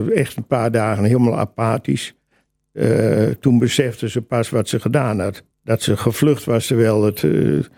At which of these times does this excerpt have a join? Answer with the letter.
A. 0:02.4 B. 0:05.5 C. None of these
B